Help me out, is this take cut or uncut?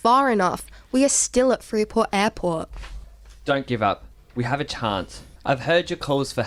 cut